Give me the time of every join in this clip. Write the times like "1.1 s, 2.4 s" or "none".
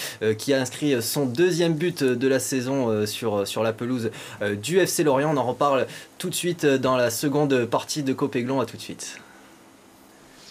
none